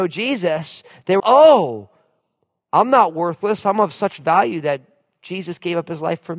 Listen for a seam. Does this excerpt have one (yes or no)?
yes